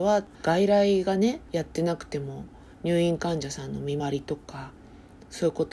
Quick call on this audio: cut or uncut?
cut